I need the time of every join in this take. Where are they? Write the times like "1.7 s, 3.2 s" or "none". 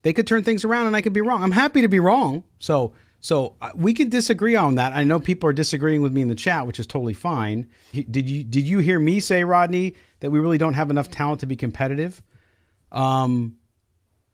2.5 s, 7.9 s